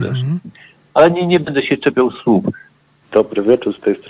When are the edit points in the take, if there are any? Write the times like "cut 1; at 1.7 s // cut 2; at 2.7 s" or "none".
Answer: cut 1; at 3.0 s